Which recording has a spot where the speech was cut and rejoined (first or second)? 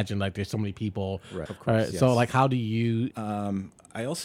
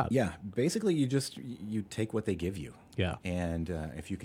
first